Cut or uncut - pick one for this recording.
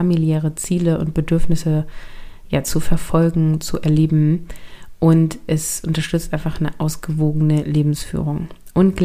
uncut